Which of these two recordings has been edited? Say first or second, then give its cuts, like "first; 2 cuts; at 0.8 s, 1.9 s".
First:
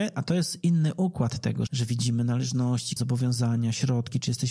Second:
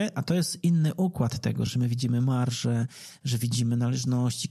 first; 2 cuts; at 1.7 s, 3.0 s